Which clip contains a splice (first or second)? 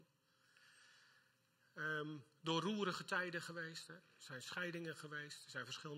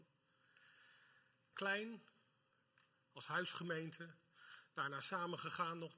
second